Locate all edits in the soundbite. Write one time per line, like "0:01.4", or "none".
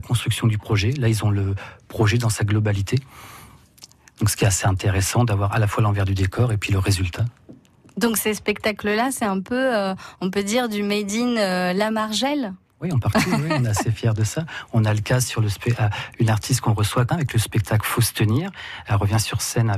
0:17.1